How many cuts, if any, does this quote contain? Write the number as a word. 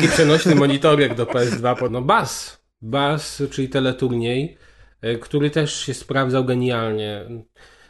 one